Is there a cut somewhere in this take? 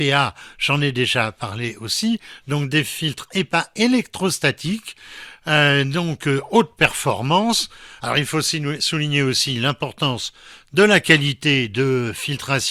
yes; 1 cut; at 8.0 s

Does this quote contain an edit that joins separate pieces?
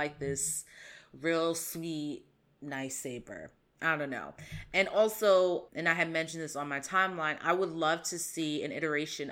yes; 1 cut; at 5.7 s

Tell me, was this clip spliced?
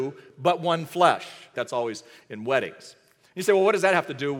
yes; 1 cut; at 1.5 s

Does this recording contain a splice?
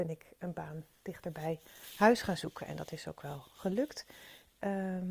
no; 0 cuts

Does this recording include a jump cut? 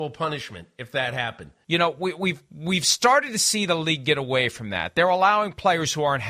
yes; 1 cut; at 1.6 s

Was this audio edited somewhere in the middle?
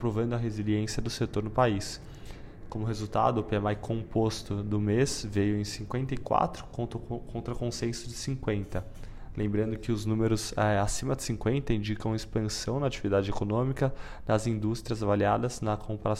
no; 0 cuts

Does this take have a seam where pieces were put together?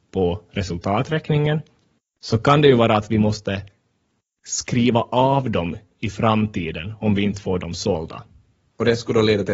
no; 0 cuts

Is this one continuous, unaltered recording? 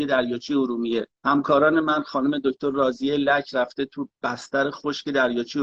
no; 1 cut; at 1.1 s

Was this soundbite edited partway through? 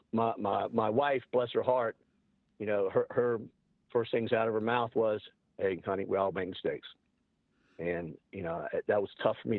no; 0 cuts

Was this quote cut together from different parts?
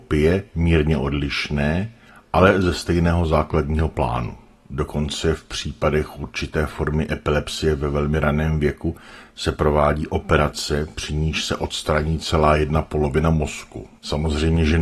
no; 0 cuts

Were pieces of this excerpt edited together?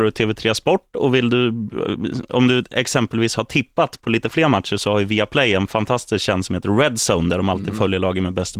no; 0 cuts

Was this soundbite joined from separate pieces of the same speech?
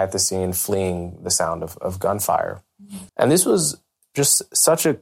yes; 1 cut; at 3.1 s

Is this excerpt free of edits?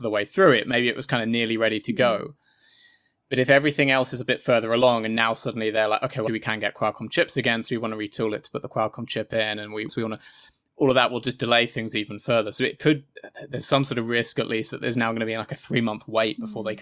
no; 2 cuts; at 6.3 s, 9.9 s

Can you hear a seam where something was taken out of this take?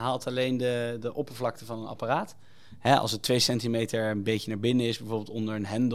no; 0 cuts

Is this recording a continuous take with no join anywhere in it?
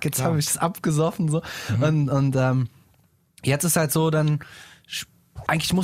yes; 0 cuts

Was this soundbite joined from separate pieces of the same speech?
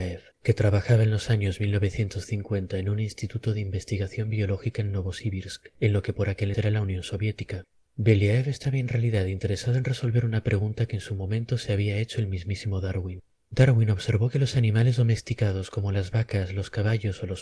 yes; 1 cut; at 6.5 s

